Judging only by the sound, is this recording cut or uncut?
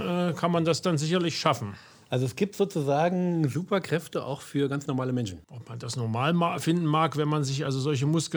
uncut